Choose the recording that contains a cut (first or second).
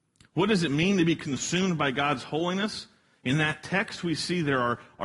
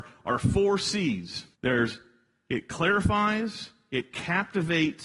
second